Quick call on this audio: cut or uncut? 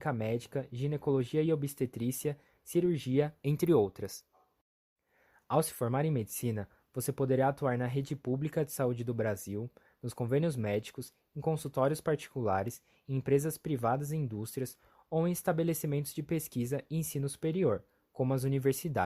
uncut